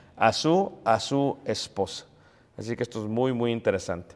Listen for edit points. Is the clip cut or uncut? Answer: uncut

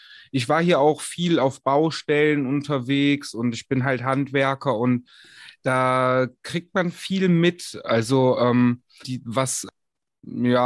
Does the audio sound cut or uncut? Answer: cut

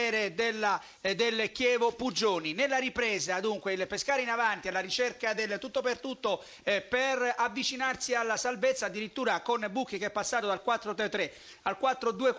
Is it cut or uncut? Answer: uncut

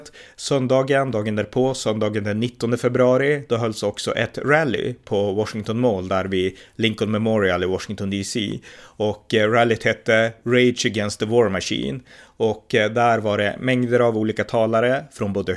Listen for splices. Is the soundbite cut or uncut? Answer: uncut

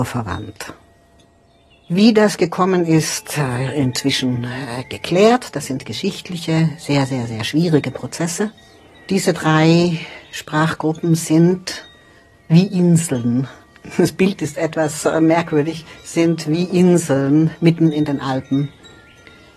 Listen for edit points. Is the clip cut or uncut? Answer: uncut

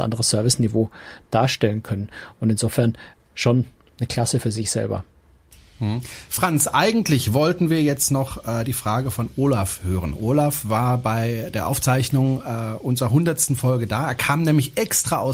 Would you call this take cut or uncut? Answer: uncut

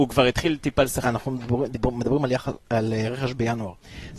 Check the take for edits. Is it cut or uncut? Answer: cut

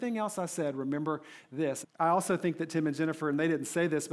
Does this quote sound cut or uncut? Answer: cut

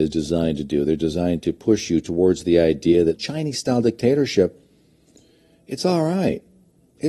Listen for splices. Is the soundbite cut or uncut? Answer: cut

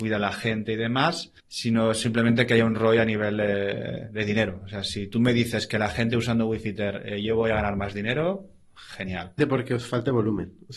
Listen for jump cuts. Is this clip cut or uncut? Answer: cut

